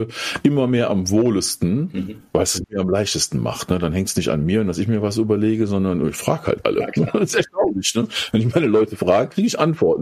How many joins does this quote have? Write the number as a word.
zero